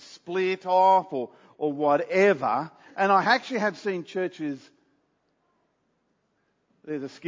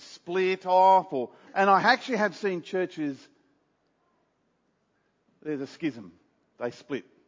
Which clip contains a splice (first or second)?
second